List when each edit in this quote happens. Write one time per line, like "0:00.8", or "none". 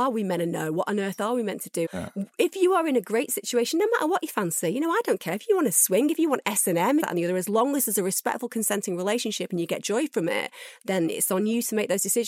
0:01.9
0:07.0